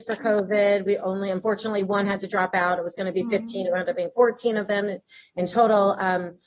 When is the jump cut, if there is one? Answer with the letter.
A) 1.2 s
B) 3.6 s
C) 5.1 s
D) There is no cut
D